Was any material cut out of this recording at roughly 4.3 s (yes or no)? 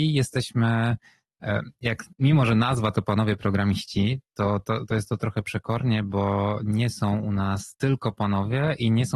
no